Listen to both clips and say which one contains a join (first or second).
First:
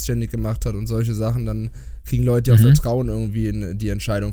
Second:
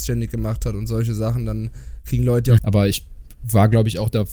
second